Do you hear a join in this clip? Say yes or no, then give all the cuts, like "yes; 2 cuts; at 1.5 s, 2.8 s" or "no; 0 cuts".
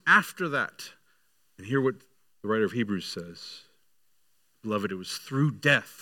yes; 2 cuts; at 1.4 s, 4.5 s